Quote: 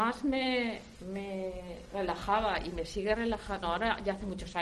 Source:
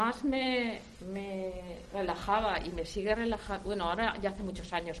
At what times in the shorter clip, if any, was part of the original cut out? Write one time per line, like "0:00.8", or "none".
0:03.6